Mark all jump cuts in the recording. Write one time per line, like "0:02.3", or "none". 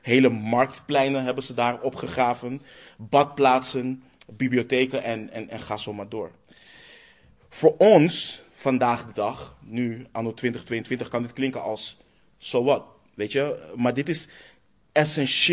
none